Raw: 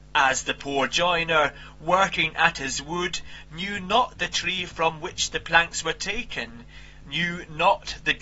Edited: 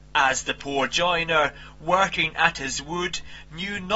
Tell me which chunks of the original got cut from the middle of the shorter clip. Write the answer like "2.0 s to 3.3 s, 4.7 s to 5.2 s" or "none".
none